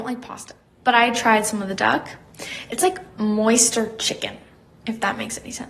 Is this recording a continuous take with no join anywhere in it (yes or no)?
yes